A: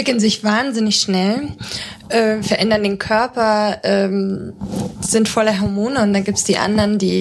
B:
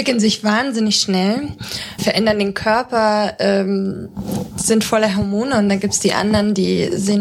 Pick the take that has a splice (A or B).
B